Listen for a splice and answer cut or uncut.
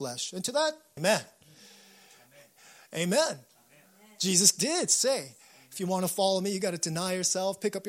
cut